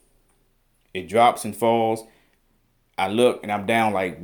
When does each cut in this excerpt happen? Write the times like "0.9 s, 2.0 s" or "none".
none

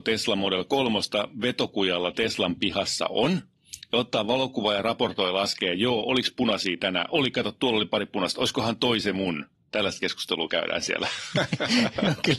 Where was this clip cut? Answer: none

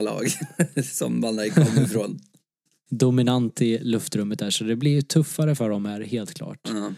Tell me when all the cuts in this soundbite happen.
none

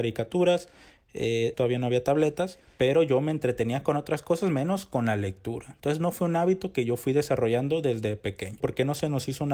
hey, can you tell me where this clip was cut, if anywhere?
1.5 s, 8.6 s

